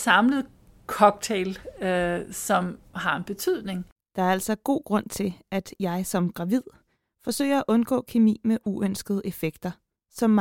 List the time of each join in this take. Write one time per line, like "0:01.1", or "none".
none